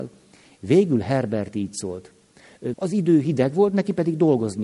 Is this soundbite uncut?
no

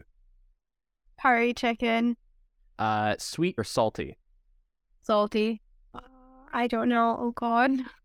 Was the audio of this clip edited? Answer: yes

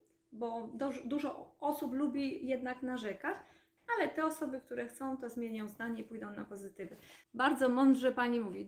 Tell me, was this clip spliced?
yes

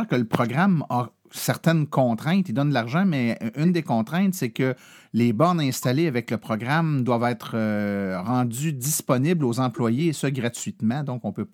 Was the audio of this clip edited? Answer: no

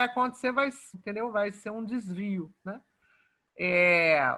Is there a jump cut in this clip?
yes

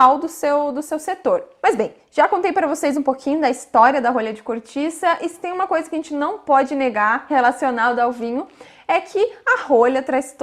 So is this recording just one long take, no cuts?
yes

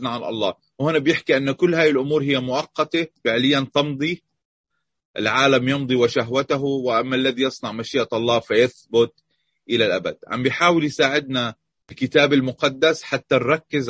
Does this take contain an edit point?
no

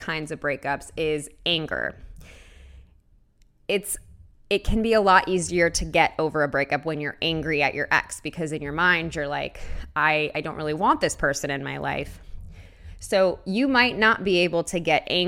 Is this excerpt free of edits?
yes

